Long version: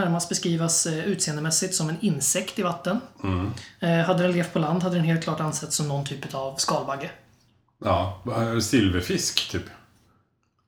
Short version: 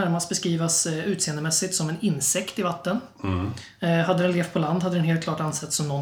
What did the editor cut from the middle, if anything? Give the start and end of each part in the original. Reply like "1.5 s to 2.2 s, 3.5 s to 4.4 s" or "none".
none